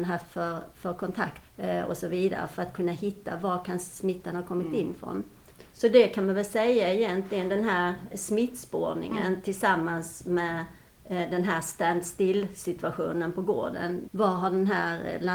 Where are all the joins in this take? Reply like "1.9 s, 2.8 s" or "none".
1.4 s, 8.1 s, 14.1 s